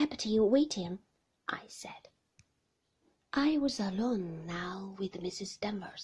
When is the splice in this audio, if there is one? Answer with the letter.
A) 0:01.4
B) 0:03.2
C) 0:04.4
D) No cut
B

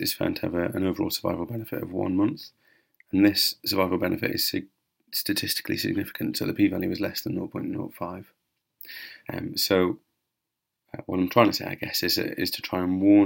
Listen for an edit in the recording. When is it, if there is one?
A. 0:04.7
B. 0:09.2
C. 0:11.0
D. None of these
B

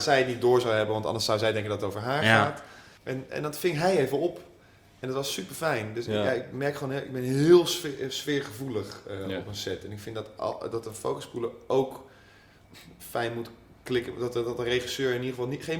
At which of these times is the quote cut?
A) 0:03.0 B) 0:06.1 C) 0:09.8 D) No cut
A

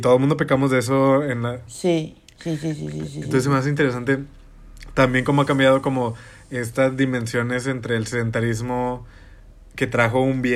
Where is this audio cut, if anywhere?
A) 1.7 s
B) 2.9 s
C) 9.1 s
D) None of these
A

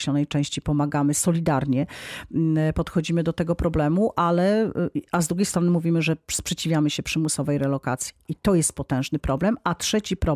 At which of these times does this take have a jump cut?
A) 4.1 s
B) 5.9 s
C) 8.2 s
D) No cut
C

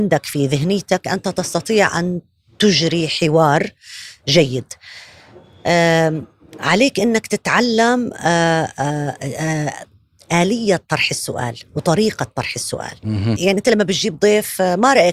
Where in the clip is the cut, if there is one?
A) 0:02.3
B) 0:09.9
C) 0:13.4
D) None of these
C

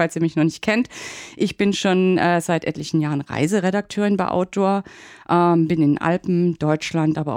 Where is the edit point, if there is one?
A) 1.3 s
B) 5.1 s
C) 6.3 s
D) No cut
D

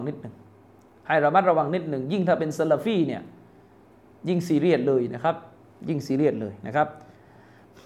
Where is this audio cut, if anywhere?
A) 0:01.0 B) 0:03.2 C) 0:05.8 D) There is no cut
D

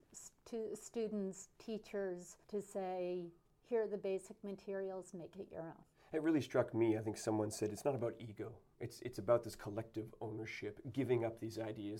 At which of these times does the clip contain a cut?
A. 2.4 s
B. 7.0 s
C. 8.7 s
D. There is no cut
A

